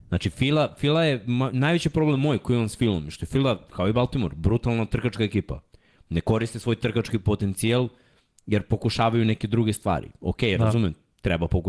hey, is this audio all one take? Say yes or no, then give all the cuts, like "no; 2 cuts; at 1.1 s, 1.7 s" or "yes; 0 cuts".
yes; 0 cuts